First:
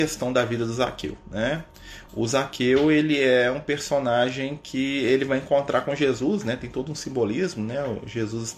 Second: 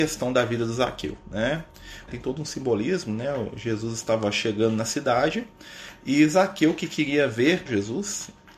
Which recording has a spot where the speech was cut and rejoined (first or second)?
second